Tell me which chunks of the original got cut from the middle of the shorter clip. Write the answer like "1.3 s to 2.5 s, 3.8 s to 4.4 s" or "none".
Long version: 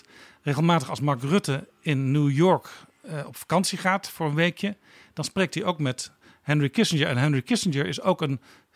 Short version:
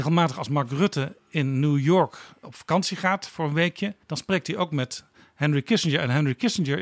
2.9 s to 3.2 s, 4.8 s to 5.1 s